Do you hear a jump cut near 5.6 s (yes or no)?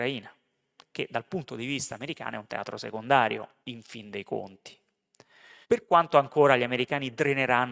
yes